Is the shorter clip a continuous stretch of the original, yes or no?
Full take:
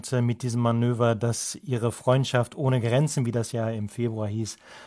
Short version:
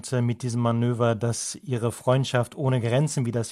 yes